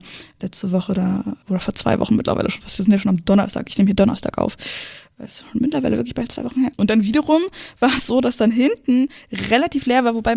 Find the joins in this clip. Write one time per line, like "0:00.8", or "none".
0:06.7